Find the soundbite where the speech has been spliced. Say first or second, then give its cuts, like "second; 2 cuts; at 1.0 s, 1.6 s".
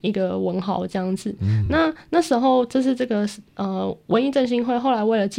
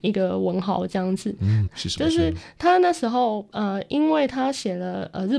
second; 1 cut; at 1.7 s